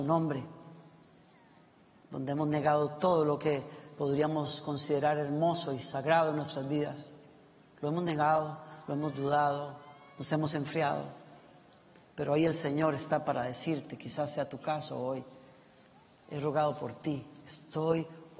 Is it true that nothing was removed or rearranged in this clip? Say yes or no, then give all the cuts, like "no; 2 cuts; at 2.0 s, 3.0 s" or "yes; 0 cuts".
yes; 0 cuts